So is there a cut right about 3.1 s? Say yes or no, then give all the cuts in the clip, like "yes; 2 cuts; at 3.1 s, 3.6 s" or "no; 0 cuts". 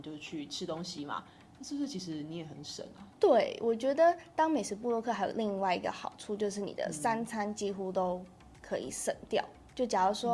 yes; 1 cut; at 3.1 s